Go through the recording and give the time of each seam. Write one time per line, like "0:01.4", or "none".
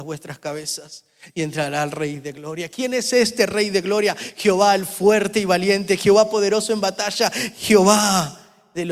none